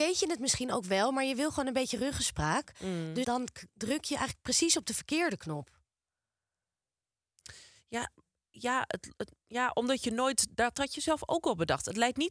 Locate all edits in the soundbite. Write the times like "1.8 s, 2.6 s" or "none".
3.2 s